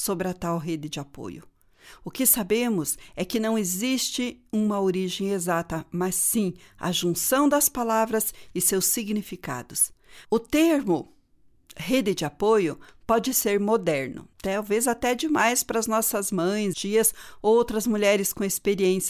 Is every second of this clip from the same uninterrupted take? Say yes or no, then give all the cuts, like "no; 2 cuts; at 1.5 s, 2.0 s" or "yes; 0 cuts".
no; 3 cuts; at 10.2 s, 14.3 s, 16.7 s